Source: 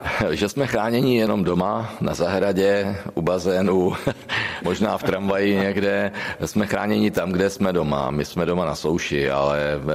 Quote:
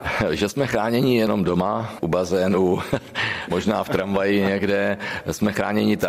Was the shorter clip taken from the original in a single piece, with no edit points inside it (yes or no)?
no